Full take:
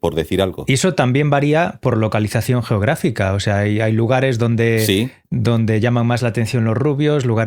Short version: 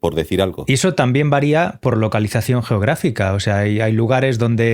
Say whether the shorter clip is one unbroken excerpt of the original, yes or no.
yes